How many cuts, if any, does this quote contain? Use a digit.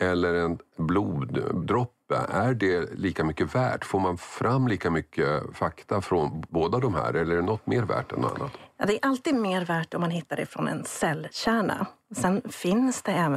0